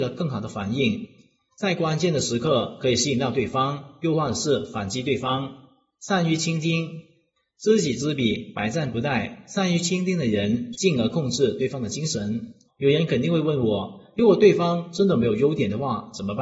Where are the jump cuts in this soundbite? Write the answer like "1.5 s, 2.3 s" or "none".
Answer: 10.7 s, 12.7 s

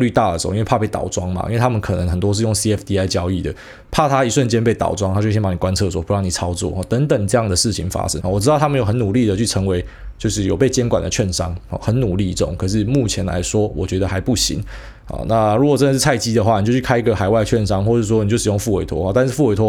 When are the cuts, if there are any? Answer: 8.2 s

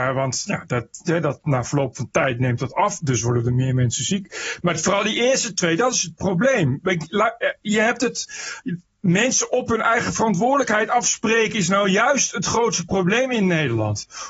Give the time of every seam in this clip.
1.1 s

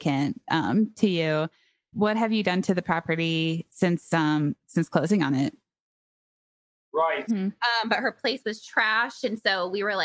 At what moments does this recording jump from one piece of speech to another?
7.3 s

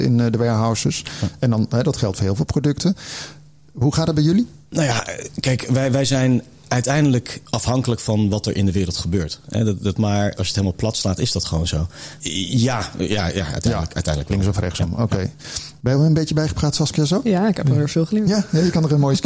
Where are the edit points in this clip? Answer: 10.0 s, 12.2 s

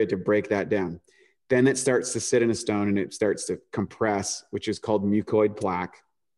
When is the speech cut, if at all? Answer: none

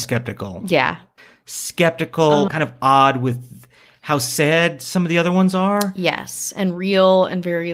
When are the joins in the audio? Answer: 2.5 s

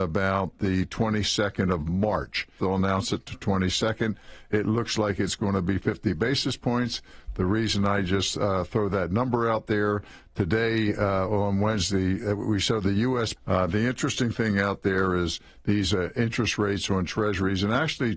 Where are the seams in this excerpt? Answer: 2.6 s, 13.4 s

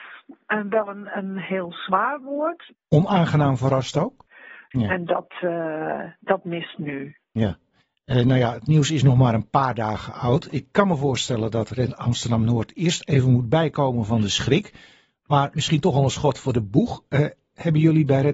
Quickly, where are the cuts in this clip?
2.7 s, 4.7 s

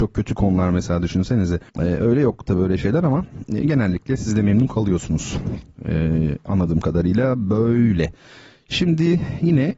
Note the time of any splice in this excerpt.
1.7 s

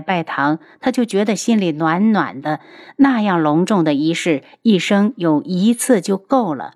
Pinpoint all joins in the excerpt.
none

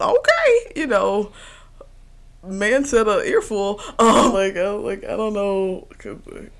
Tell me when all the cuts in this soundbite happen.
2.3 s, 4.3 s

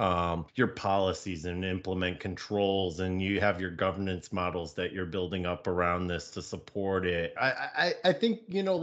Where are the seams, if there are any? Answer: 7.4 s

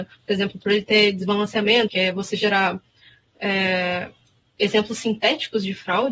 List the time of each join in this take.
1.9 s

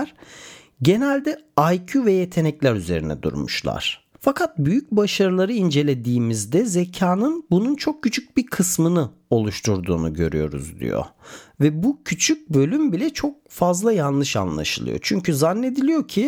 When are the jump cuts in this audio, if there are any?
4.1 s

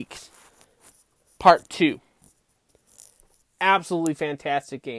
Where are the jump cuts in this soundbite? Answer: 3.4 s

